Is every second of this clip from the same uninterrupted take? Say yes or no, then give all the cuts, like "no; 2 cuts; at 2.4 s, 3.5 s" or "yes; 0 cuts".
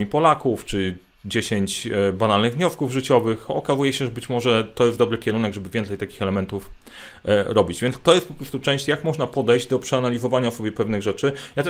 yes; 0 cuts